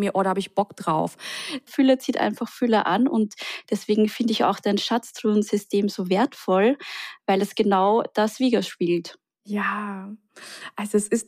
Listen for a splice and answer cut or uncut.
cut